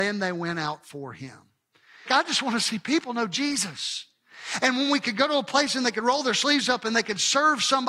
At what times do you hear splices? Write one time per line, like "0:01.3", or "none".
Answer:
0:02.1
0:04.6